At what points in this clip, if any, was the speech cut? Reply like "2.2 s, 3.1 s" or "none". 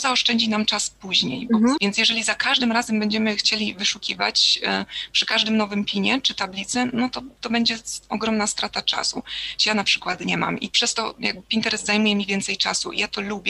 1.8 s, 9.6 s